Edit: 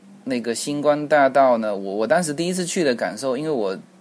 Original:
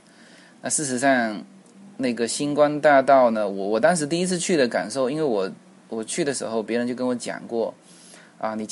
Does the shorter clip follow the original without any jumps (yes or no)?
yes